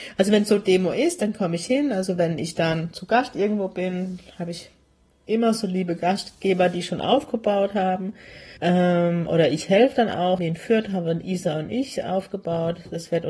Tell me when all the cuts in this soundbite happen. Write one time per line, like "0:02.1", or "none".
0:08.6
0:10.4